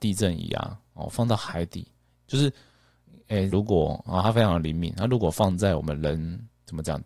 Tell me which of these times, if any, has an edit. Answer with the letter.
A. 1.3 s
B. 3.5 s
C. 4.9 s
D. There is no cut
B